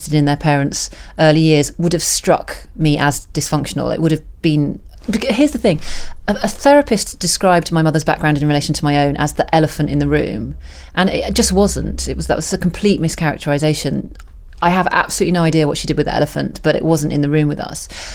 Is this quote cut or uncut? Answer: uncut